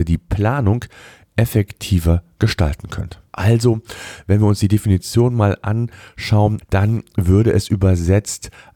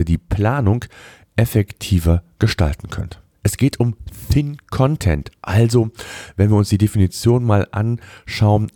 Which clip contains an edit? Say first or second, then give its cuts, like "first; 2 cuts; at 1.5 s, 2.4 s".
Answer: first; 2 cuts; at 3.3 s, 6.6 s